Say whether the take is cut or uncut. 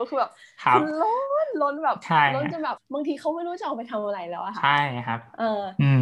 cut